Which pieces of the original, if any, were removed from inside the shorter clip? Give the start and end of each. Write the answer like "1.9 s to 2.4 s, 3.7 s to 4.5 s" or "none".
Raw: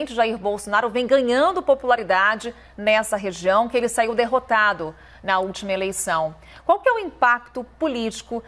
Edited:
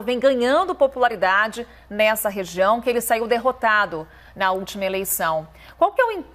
none